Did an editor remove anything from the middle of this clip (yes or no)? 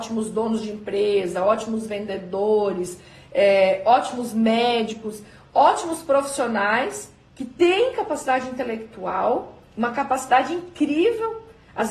no